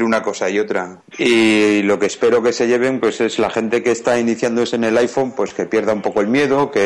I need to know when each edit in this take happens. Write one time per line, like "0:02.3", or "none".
0:01.1